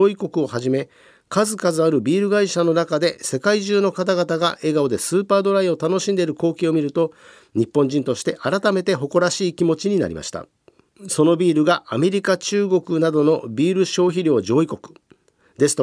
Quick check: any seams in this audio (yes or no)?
yes